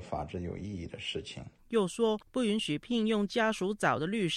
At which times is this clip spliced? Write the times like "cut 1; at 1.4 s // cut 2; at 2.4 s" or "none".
cut 1; at 1.6 s